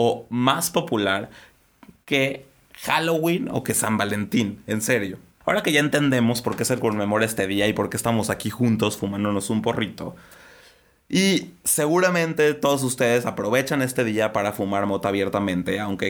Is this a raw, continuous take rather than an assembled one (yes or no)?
yes